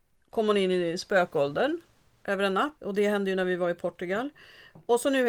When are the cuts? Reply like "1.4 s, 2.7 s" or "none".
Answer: 2.8 s

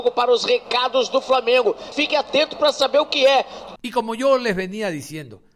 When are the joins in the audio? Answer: 1.9 s, 3.8 s

